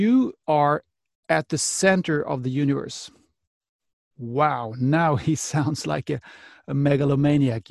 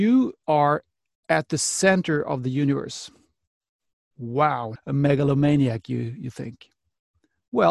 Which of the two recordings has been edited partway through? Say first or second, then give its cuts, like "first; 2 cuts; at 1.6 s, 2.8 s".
second; 1 cut; at 4.8 s